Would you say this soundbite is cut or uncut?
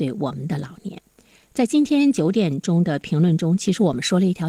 uncut